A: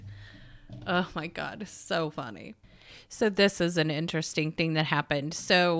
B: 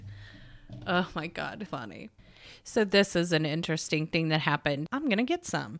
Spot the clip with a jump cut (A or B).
B